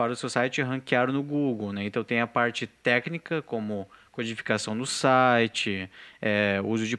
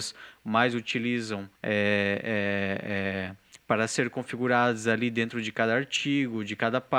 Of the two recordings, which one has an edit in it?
second; 1 cut; at 1.6 s

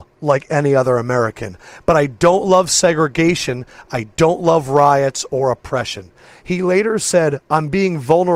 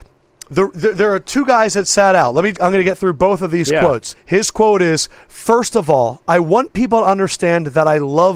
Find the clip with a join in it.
second; 2 cuts; at 2.5 s, 4.1 s

